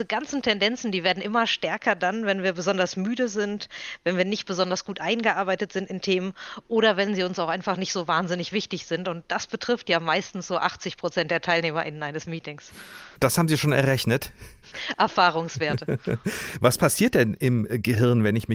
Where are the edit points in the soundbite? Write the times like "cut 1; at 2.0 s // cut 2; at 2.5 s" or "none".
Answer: none